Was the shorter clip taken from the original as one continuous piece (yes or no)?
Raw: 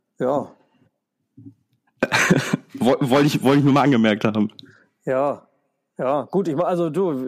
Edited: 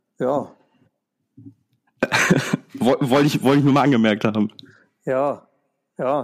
yes